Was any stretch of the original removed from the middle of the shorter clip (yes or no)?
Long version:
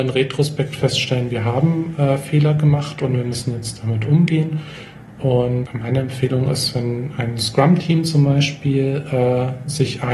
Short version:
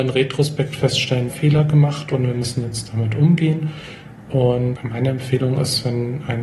yes